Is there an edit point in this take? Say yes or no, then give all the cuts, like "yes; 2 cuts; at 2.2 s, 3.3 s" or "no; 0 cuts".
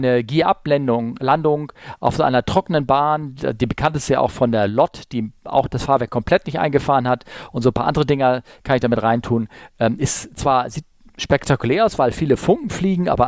yes; 1 cut; at 3.4 s